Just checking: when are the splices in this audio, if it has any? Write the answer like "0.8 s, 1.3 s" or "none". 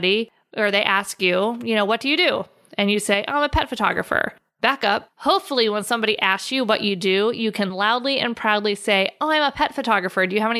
none